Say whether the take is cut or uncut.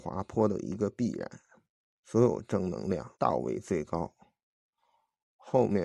cut